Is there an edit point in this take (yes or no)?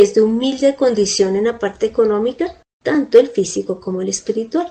yes